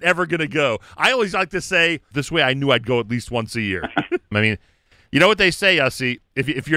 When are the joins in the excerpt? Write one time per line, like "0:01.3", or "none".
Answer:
0:02.1
0:04.3